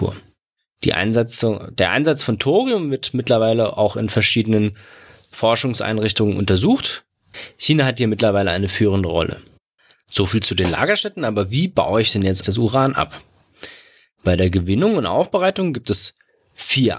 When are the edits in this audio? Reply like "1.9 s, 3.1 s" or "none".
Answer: 12.4 s